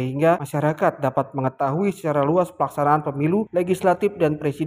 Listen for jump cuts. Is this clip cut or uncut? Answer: uncut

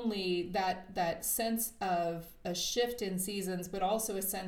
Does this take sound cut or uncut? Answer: uncut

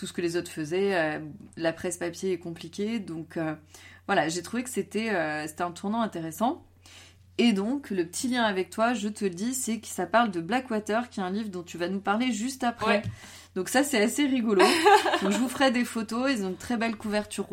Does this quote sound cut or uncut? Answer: uncut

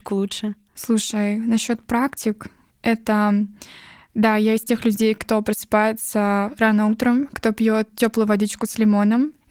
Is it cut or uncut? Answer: uncut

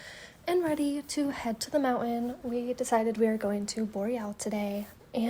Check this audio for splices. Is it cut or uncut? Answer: uncut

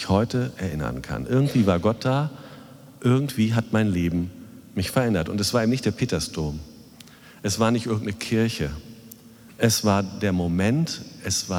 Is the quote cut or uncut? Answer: uncut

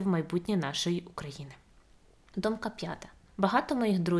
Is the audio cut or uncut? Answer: cut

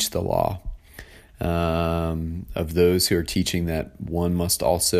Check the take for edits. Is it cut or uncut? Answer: cut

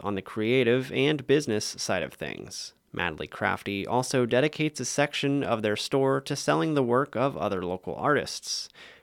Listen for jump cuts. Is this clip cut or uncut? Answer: cut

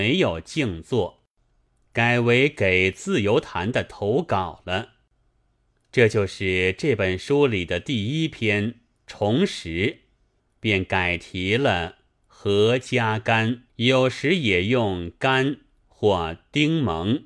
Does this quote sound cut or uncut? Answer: cut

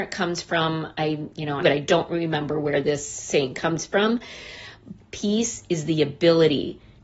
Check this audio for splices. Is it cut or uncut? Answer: cut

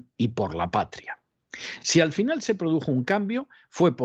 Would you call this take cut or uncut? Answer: uncut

